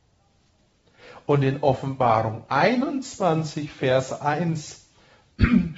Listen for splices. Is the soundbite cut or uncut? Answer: uncut